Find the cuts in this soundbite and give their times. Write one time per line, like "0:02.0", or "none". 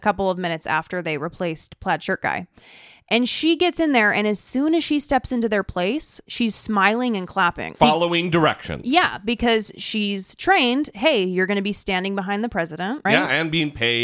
0:07.7
0:13.1